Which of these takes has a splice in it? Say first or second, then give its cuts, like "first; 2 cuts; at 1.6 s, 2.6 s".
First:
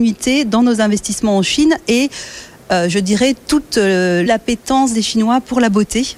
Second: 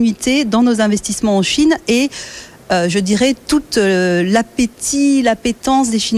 first; 1 cut; at 4.3 s